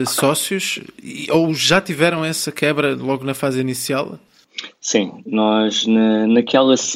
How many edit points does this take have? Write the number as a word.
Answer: zero